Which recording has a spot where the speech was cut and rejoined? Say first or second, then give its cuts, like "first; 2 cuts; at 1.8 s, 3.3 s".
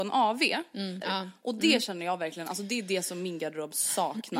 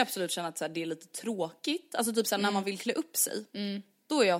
first; 1 cut; at 1.0 s